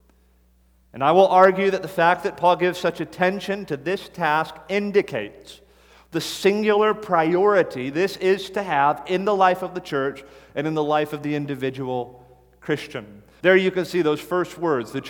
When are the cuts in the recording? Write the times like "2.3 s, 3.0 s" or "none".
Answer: 13.4 s